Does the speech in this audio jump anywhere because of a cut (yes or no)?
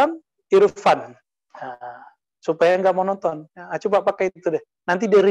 yes